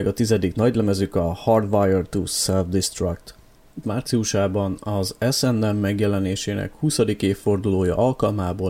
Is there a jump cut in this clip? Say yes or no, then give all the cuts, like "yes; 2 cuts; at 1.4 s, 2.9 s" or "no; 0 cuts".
yes; 1 cut; at 3.8 s